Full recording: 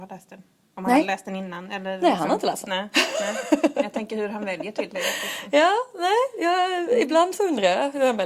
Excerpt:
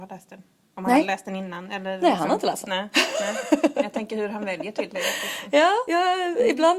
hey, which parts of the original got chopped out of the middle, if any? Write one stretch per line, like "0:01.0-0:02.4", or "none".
0:05.9-0:06.4